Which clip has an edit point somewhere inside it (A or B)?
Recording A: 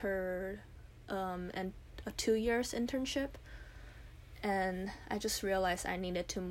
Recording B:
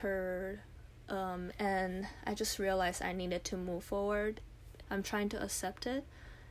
B